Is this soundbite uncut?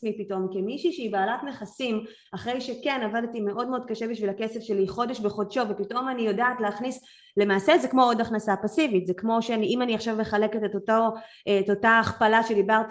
yes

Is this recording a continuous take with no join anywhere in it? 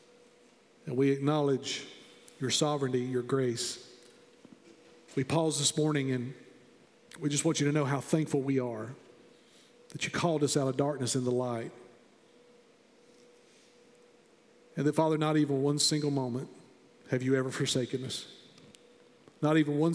yes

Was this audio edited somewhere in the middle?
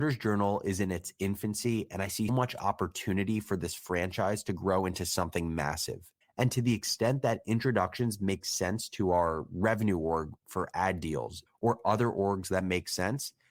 yes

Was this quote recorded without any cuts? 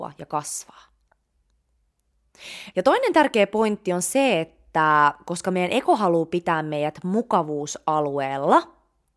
no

